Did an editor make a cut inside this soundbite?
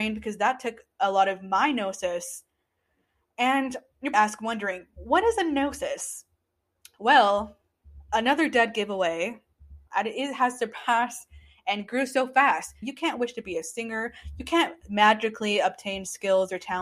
yes; 3 cuts; at 4.1 s, 9.9 s, 12.8 s

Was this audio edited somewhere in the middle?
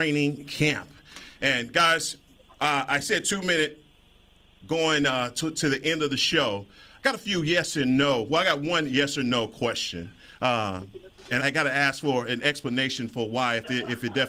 yes; 1 cut; at 11.4 s

